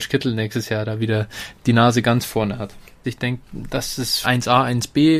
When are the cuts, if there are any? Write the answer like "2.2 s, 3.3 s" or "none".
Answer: 3.0 s, 4.2 s